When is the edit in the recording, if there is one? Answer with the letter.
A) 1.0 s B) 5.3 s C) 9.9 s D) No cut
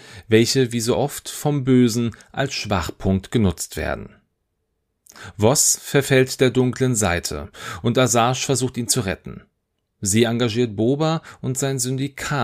D